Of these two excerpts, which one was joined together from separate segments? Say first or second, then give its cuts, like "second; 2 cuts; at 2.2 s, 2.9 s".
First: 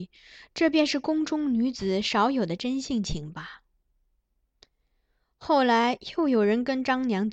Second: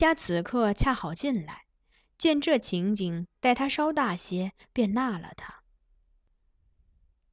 second; 1 cut; at 3.4 s